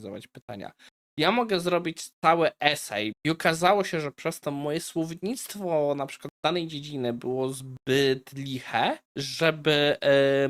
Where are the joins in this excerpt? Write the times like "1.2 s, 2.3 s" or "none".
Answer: 3.1 s, 9.1 s